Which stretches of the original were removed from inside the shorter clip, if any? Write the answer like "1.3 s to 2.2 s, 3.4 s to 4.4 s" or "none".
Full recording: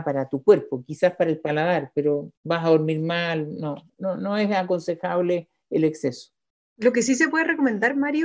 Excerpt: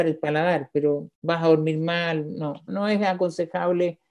3.9 s to 4.2 s